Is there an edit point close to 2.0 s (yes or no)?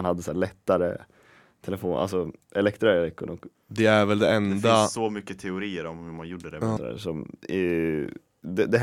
no